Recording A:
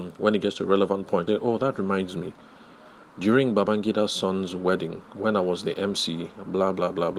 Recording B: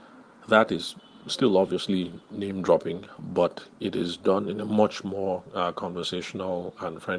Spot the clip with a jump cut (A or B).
A